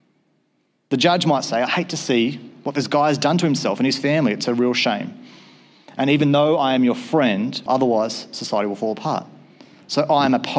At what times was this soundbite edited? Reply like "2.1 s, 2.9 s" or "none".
7.7 s

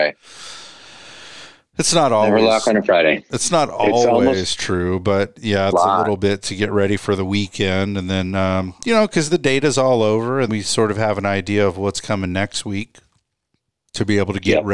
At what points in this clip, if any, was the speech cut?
5.7 s, 10.5 s

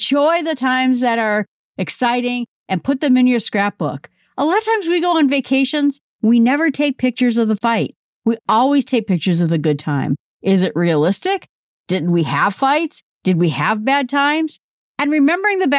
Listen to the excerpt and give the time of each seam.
none

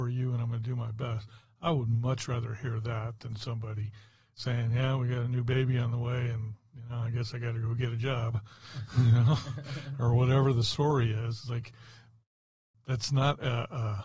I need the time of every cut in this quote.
none

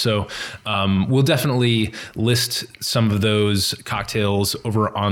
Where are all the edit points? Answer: none

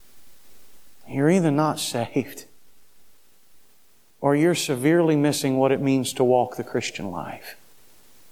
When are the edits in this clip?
none

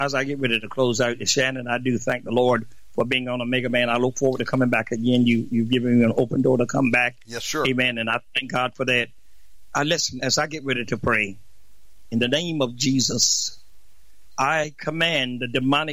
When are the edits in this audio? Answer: none

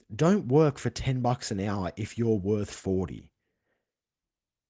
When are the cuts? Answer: none

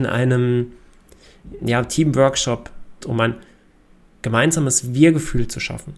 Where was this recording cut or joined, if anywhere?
1.6 s, 3.0 s

